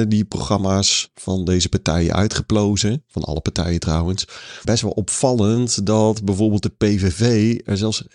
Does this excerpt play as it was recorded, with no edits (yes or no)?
no